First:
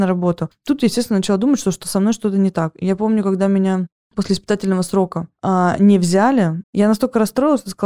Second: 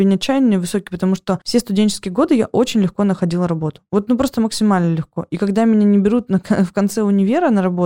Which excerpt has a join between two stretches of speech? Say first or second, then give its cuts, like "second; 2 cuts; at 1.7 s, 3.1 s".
first; 1 cut; at 6.6 s